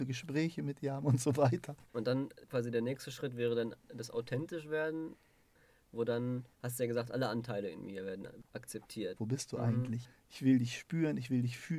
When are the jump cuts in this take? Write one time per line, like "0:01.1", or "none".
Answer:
0:01.9
0:09.2